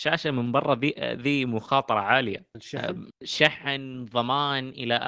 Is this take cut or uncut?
uncut